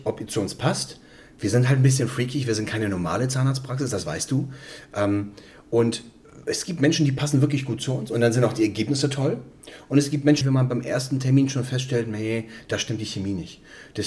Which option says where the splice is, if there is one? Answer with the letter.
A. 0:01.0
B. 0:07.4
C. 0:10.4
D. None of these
C